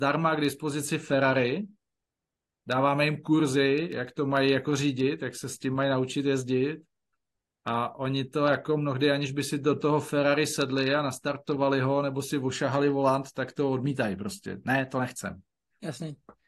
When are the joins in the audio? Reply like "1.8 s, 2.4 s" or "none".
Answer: none